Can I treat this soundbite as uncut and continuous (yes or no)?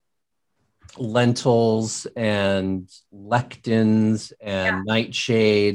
yes